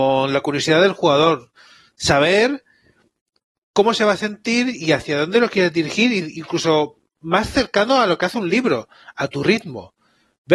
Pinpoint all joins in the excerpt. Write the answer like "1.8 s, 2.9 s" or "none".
none